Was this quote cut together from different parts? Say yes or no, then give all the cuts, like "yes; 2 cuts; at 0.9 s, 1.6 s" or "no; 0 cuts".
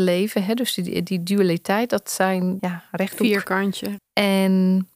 yes; 2 cuts; at 2.6 s, 4.0 s